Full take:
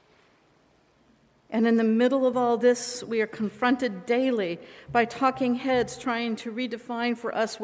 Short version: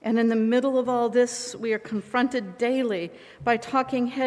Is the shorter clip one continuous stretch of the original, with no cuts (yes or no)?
yes